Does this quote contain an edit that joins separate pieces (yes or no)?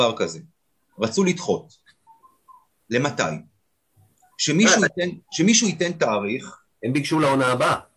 no